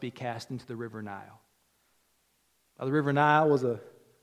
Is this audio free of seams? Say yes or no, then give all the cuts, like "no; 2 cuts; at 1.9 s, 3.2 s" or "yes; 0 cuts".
yes; 0 cuts